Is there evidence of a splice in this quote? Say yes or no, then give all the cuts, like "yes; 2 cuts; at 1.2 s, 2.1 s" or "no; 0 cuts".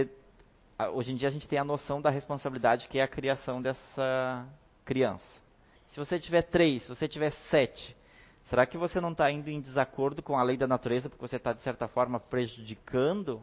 yes; 1 cut; at 5.8 s